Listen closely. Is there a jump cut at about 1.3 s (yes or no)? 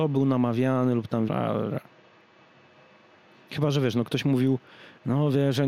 yes